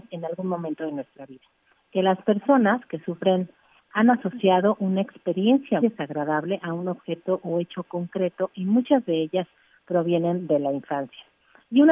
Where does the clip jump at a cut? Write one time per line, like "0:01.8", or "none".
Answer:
0:01.8
0:05.8